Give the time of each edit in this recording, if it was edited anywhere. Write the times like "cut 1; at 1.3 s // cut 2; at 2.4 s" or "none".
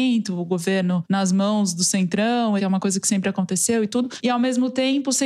cut 1; at 2.6 s